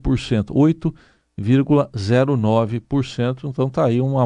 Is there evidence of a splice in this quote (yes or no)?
no